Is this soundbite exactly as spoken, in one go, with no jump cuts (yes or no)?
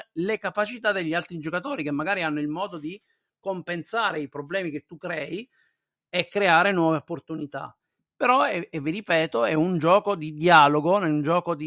yes